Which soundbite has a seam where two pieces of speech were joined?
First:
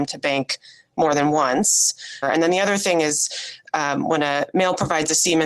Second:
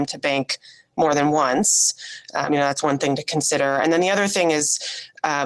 first; 1 cut; at 2.2 s

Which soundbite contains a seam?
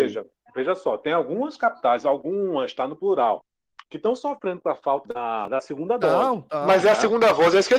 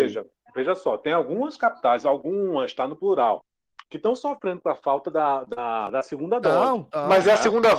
first; 1 cut; at 5.0 s

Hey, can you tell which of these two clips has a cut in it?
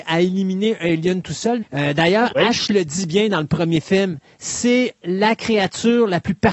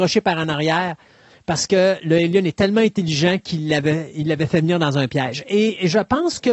first; 1 cut; at 1.6 s

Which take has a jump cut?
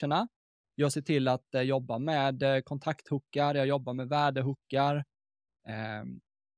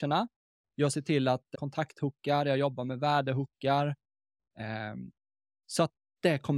second; 1 cut; at 1.5 s

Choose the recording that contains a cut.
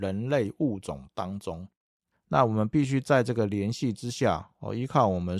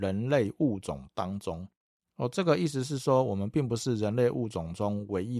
first; 1 cut; at 2.1 s

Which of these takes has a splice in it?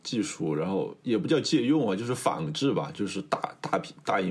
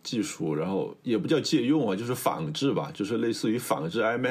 first; 1 cut; at 3.0 s

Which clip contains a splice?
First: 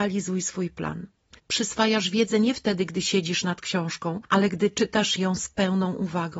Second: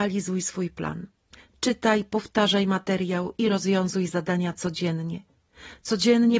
first; 1 cut; at 1.4 s

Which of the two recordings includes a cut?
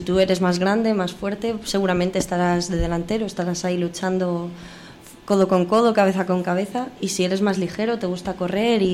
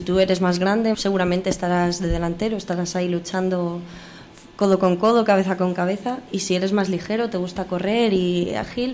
second; 1 cut; at 0.9 s

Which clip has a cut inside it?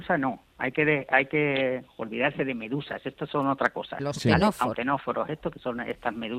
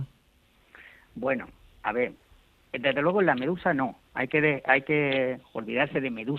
first; 1 cut; at 4.7 s

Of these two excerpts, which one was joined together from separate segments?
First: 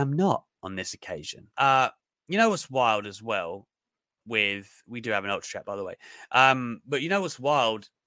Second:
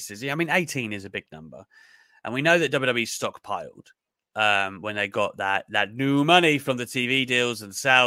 first; 1 cut; at 1.5 s

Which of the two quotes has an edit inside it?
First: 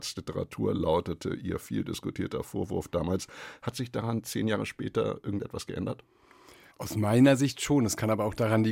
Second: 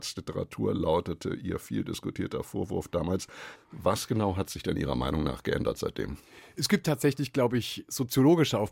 second; 1 cut; at 3.6 s

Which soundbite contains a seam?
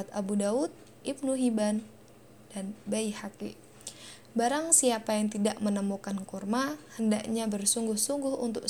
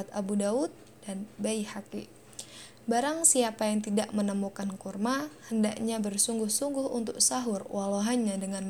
second; 1 cut; at 0.9 s

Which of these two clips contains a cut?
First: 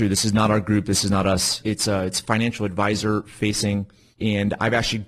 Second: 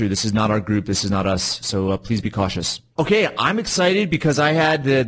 first; 1 cut; at 1.6 s

